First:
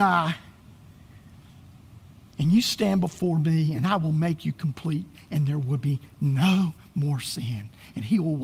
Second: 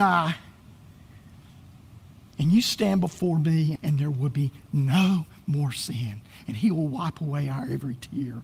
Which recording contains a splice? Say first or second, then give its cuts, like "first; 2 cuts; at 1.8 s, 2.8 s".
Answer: second; 1 cut; at 3.8 s